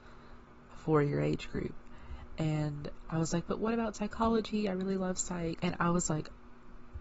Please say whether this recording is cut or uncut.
cut